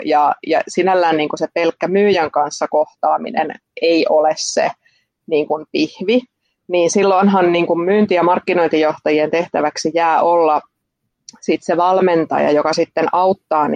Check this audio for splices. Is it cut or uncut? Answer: uncut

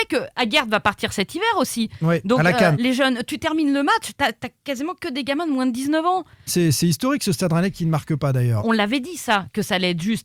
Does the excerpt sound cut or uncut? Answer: cut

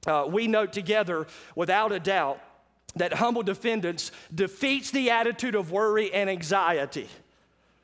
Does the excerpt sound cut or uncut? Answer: uncut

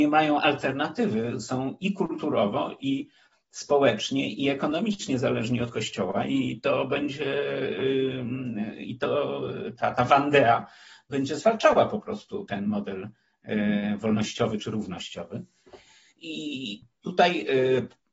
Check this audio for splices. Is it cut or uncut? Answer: cut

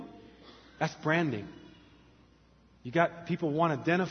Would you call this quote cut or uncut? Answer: uncut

